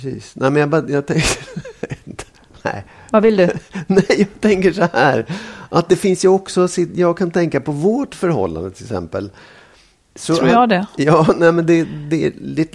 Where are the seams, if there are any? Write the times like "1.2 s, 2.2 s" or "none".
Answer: none